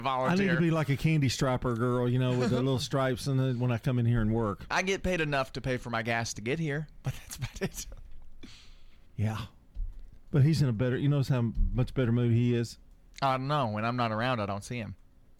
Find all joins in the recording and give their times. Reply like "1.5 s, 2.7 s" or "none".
4.7 s, 7.0 s